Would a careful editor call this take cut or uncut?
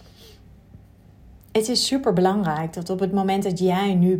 uncut